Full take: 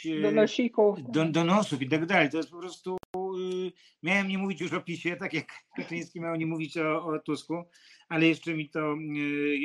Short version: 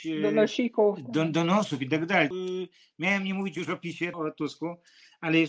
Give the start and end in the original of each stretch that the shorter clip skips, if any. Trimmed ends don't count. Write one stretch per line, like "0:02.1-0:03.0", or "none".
0:02.3-0:03.3
0:05.2-0:07.0